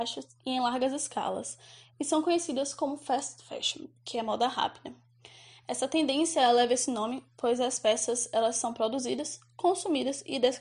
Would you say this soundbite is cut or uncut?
uncut